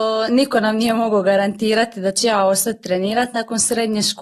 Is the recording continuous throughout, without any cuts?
yes; 0 cuts

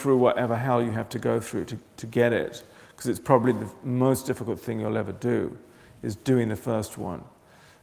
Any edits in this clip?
no; 0 cuts

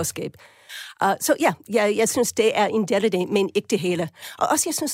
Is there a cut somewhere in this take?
no; 0 cuts

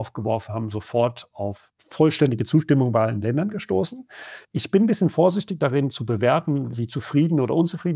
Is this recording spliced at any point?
no; 0 cuts

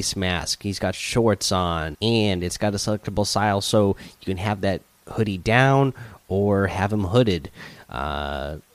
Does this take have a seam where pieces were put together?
yes; 1 cut; at 1.9 s

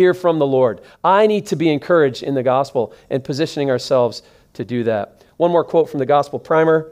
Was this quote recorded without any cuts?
yes; 0 cuts

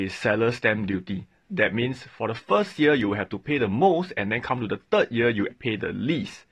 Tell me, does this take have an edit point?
yes; 2 cuts; at 1.5 s, 5.5 s

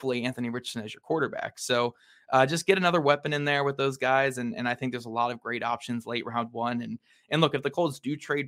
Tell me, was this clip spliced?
no; 0 cuts

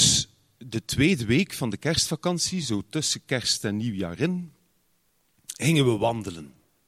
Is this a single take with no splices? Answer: yes; 0 cuts

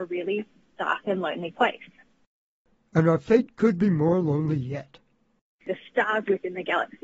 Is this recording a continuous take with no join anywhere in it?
no; 1 cut; at 5.6 s

